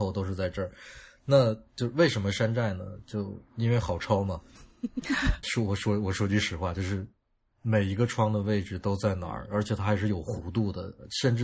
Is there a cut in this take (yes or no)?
yes